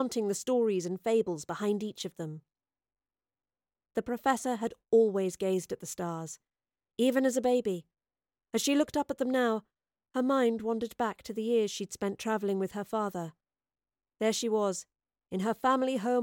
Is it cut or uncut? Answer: uncut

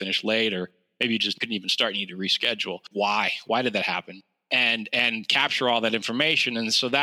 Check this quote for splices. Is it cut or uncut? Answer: cut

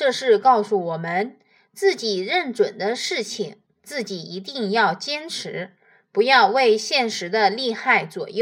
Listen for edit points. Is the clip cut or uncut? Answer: uncut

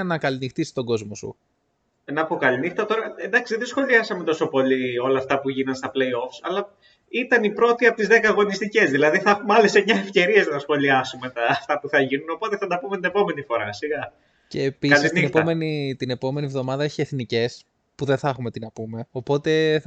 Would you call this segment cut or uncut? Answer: uncut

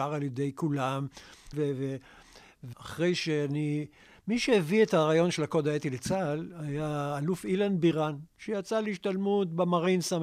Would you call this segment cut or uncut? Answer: cut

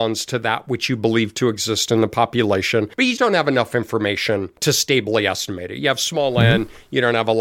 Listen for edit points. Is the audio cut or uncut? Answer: cut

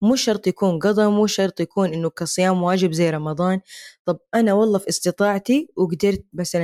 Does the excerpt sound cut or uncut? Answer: uncut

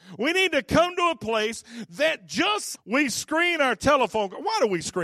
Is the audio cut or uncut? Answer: cut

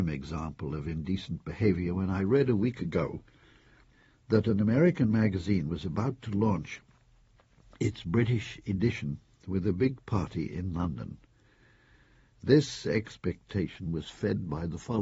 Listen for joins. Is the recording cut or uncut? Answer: uncut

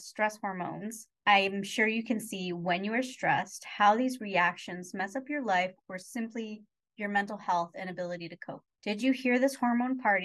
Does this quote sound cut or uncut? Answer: uncut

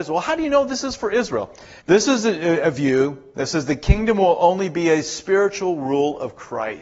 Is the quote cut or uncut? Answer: cut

